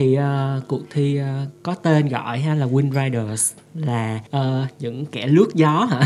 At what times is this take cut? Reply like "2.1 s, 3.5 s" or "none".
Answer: 4.3 s